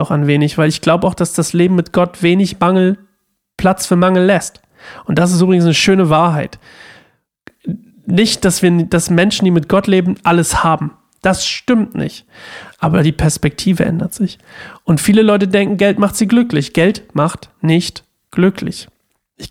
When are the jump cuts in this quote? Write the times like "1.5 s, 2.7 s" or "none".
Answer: none

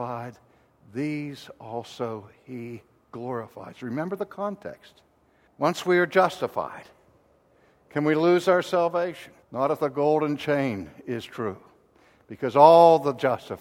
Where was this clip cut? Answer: 5.5 s, 9.4 s

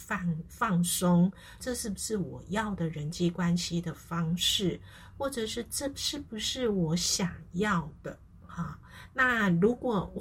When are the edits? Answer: 1.6 s

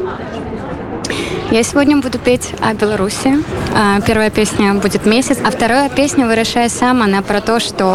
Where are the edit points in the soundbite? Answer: 5.4 s

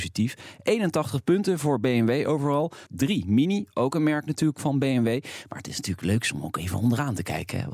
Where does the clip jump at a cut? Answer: 2.9 s

